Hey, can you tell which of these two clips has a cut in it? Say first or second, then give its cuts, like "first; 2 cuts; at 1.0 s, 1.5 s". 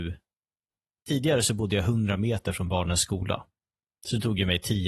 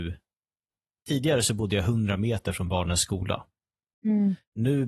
second; 1 cut; at 3.9 s